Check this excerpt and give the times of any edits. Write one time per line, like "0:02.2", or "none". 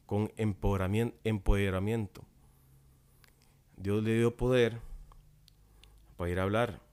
none